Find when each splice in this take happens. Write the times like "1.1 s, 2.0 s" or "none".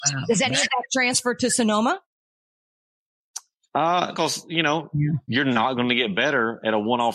4.1 s, 5.3 s